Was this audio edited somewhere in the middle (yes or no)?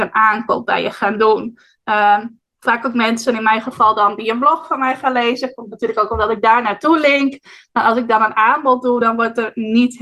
no